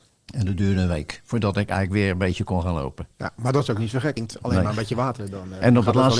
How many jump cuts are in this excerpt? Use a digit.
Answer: 1